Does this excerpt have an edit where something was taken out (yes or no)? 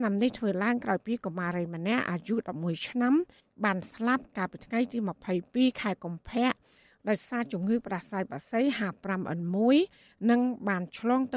no